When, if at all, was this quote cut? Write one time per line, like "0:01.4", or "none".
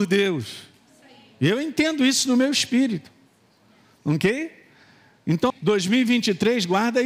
0:05.5